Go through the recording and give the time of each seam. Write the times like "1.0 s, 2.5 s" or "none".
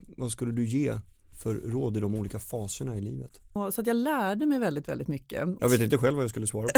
3.6 s, 5.6 s